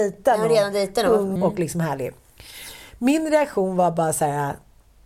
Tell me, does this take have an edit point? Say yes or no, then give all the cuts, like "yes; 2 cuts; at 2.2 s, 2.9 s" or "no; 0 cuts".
yes; 1 cut; at 1.4 s